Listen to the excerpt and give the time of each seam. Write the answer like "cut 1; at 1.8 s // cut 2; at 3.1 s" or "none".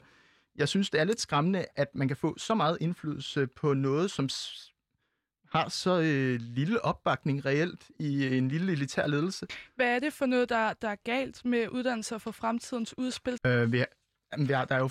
cut 1; at 13.4 s